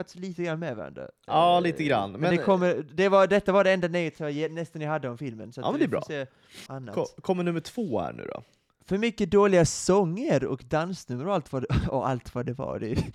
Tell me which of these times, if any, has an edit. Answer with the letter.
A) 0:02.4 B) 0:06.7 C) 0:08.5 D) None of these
B